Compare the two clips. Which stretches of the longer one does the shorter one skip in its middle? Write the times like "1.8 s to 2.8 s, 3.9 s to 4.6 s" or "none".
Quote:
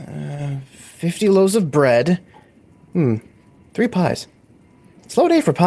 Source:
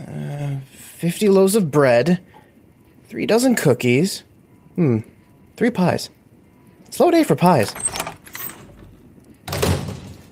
2.7 s to 4.5 s